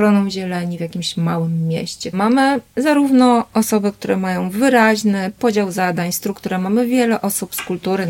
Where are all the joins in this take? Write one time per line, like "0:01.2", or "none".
0:02.1